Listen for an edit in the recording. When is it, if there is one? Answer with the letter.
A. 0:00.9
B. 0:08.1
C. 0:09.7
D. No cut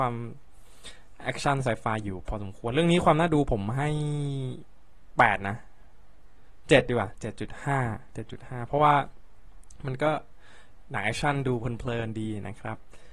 B